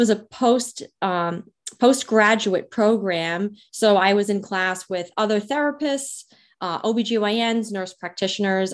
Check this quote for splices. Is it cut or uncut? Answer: uncut